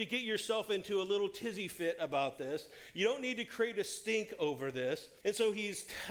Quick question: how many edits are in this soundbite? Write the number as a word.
one